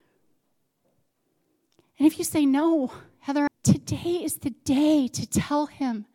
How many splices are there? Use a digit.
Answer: 1